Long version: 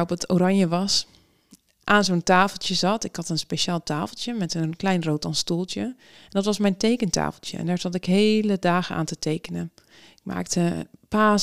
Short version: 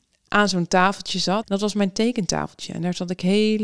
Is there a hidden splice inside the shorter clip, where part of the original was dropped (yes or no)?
yes